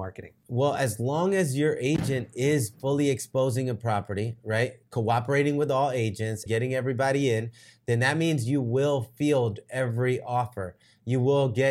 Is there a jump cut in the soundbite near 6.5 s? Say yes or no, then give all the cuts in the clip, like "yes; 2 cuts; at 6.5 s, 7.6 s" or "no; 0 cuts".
yes; 1 cut; at 6.5 s